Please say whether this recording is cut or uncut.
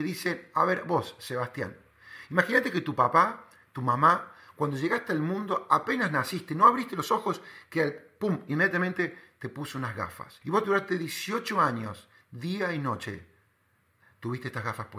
cut